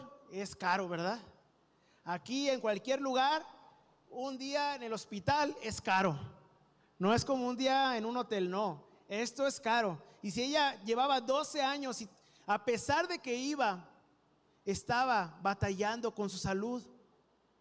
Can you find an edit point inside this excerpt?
no; 0 cuts

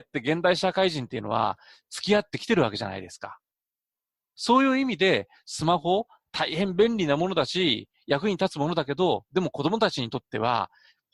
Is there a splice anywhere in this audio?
no; 0 cuts

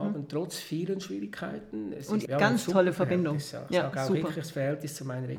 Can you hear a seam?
yes; 1 cut; at 2.3 s

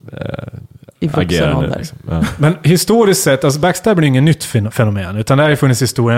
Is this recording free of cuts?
yes; 0 cuts

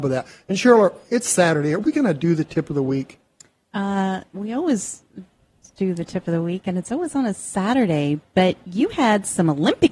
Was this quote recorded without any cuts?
yes; 0 cuts

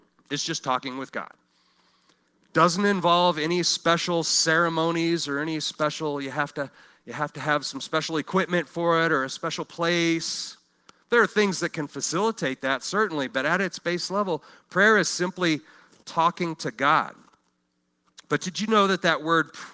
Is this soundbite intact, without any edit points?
yes; 0 cuts

